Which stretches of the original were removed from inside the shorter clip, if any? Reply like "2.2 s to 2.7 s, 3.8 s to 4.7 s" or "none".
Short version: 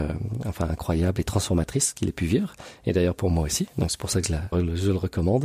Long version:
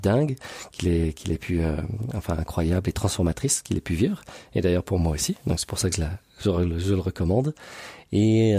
6.2 s to 6.6 s